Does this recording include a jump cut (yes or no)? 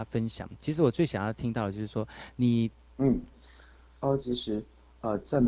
yes